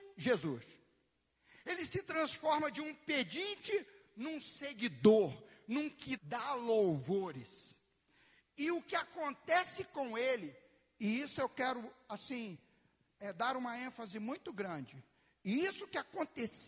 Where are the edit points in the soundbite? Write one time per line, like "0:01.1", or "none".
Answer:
0:06.2